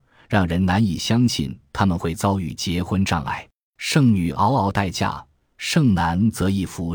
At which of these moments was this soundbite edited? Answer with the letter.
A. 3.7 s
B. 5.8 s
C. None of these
A